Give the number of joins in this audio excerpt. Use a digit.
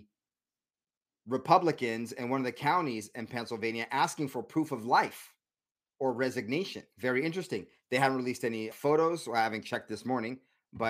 2